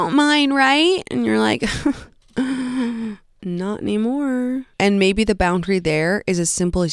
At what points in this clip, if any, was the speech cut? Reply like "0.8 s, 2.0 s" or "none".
4.7 s